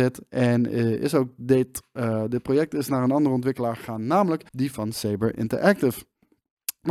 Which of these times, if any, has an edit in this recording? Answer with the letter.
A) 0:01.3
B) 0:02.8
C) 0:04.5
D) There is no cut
C